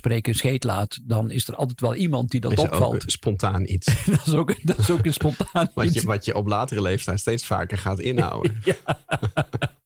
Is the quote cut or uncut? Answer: uncut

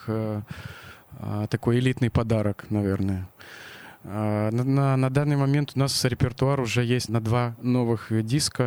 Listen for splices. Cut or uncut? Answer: cut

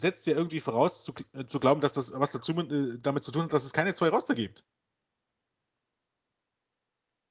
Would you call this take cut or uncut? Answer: uncut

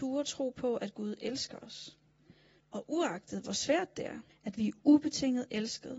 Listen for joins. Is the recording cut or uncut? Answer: cut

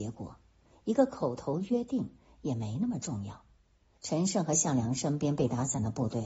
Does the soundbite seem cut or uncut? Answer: cut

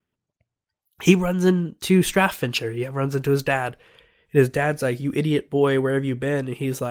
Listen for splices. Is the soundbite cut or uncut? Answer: uncut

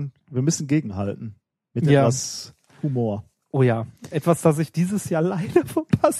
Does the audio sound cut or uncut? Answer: uncut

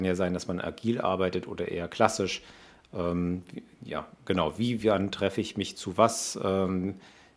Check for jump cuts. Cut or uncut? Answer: uncut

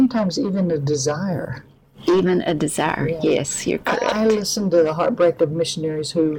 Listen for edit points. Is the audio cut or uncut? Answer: uncut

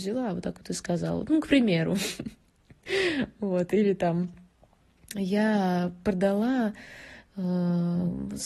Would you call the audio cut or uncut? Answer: uncut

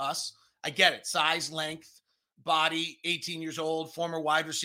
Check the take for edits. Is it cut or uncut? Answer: cut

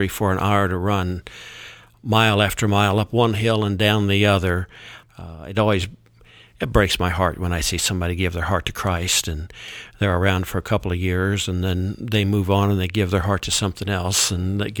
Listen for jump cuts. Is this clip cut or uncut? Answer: cut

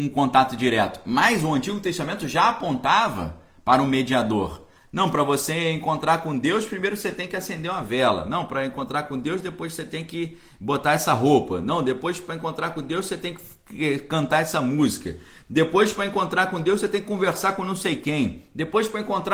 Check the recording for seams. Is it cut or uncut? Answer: cut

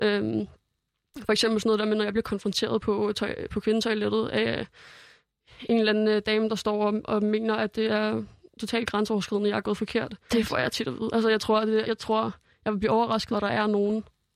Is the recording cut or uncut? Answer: cut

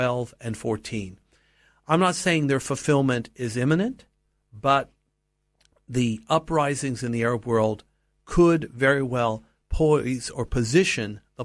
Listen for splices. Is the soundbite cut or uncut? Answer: uncut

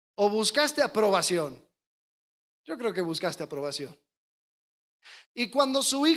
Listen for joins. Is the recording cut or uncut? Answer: cut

